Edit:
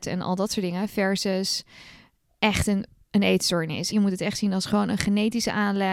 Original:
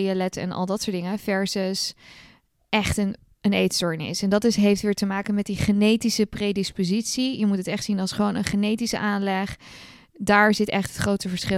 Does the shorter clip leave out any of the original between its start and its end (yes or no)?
yes